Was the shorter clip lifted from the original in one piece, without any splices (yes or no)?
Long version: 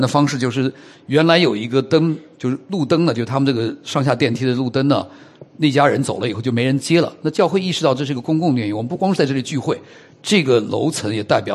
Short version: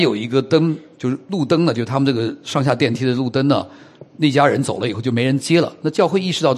yes